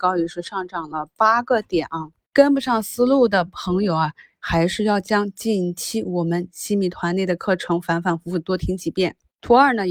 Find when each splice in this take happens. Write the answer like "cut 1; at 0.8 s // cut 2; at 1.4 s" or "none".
none